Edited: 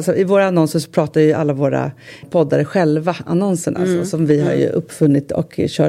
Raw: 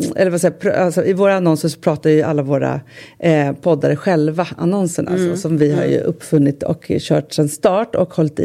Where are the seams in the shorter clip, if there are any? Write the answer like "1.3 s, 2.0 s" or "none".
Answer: 2.2 s